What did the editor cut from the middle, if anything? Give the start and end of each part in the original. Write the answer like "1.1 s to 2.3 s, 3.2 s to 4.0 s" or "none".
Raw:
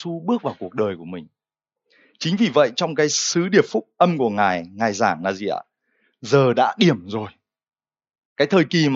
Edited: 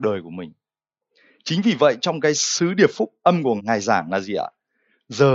4.3 s to 4.7 s